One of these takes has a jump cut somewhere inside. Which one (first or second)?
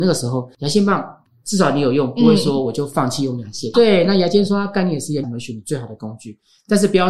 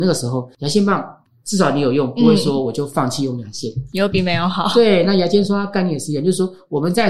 first